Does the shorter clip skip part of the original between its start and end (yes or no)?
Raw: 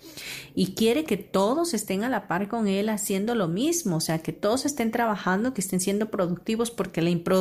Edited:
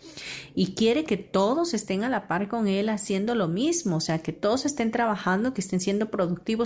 no